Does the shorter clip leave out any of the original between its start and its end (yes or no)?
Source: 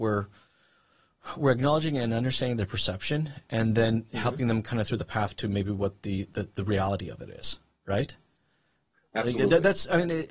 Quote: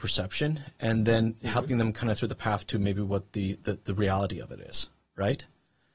no